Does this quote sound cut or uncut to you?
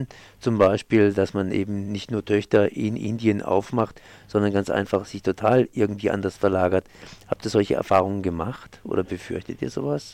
uncut